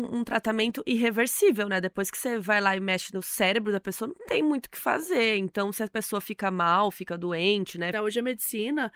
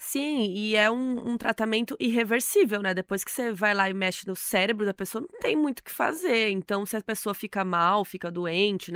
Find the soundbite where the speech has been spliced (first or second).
first